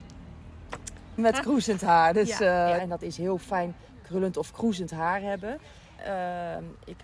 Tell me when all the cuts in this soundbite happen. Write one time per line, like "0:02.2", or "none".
0:01.2
0:02.8
0:06.0